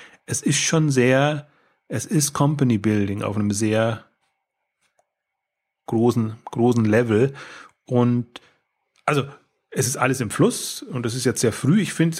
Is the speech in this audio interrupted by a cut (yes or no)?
no